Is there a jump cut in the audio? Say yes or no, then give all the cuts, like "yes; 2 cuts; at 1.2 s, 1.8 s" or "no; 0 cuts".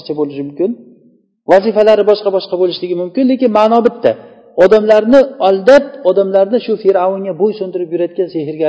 no; 0 cuts